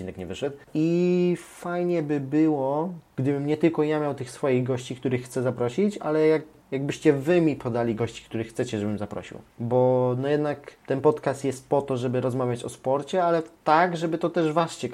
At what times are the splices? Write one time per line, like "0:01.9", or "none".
none